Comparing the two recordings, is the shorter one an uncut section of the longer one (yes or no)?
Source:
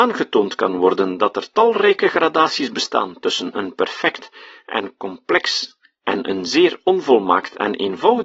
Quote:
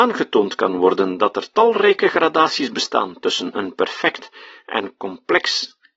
yes